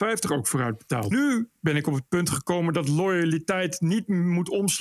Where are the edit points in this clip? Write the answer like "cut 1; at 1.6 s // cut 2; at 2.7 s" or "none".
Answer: cut 1; at 1.1 s